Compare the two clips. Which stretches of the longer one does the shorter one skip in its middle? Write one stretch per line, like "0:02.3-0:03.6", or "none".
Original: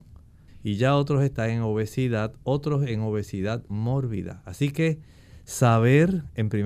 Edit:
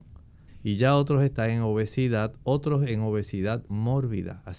none